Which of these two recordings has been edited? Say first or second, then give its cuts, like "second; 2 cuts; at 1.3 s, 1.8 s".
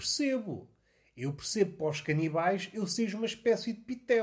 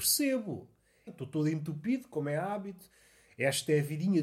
second; 1 cut; at 1.1 s